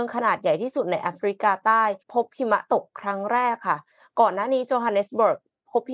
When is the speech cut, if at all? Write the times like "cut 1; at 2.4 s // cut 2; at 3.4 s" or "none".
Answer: cut 1; at 2.0 s